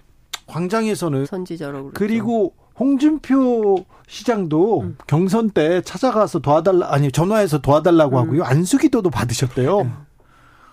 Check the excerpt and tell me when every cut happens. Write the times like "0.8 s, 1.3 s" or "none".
1.2 s, 9.8 s